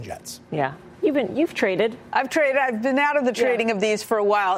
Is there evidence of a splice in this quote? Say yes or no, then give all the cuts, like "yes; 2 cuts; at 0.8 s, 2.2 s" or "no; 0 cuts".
no; 0 cuts